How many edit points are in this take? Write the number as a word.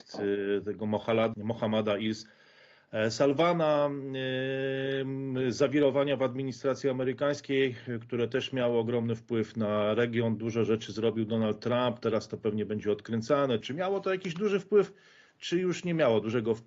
two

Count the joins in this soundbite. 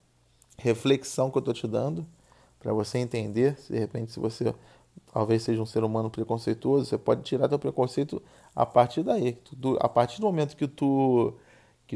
zero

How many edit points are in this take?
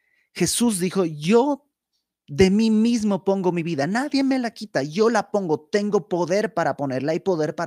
zero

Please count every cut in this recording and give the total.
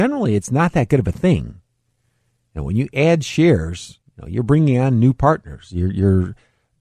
zero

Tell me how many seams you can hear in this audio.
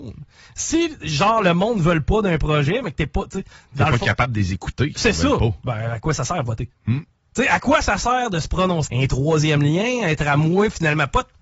two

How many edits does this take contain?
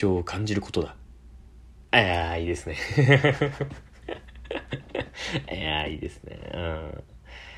one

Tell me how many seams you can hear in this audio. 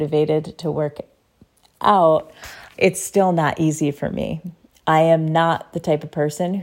one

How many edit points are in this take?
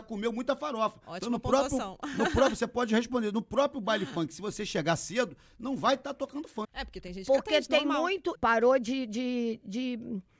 two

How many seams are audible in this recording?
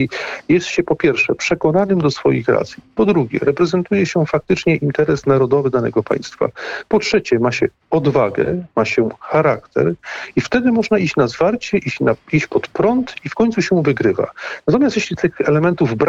zero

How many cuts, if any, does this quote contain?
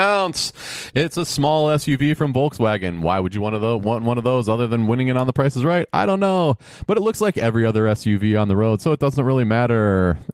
zero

